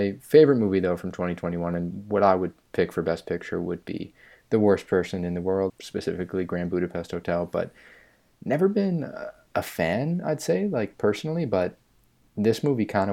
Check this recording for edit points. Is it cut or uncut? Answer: cut